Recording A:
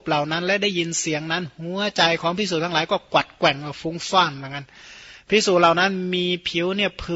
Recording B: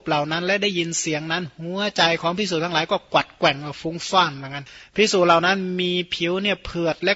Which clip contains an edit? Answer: B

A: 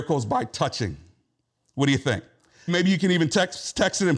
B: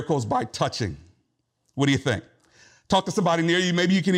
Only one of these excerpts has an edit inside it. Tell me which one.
A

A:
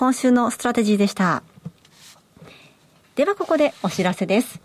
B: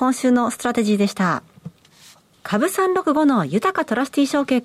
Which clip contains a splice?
B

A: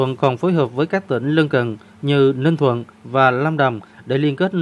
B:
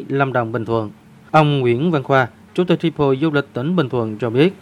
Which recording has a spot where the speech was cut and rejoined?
B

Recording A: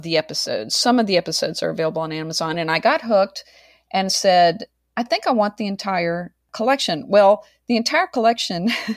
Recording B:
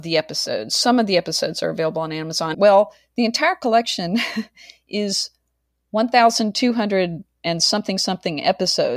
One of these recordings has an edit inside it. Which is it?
B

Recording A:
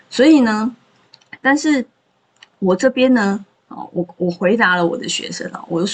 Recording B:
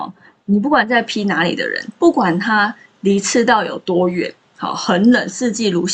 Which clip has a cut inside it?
A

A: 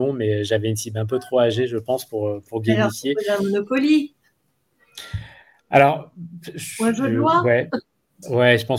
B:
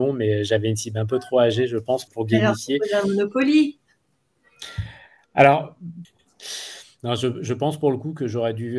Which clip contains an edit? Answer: B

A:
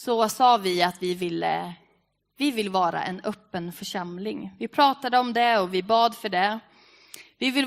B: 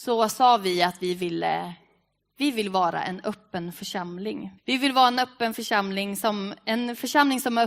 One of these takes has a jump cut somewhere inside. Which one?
B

